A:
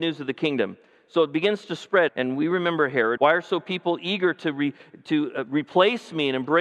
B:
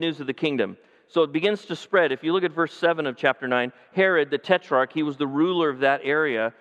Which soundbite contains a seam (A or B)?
A